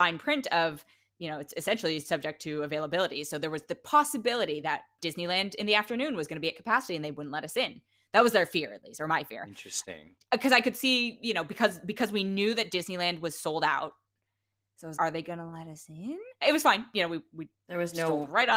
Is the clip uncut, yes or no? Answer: no